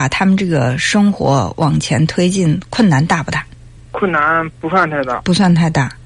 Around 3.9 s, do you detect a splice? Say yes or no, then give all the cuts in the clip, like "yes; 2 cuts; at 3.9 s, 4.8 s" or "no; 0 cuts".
no; 0 cuts